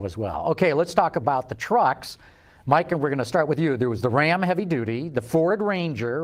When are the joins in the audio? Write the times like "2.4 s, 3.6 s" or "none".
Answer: none